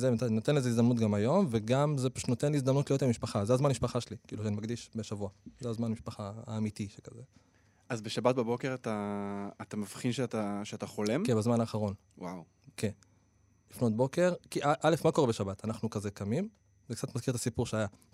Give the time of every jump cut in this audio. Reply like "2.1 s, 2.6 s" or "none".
none